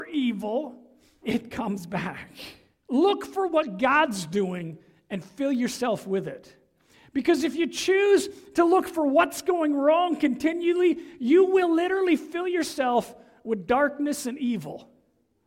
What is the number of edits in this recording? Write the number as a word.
two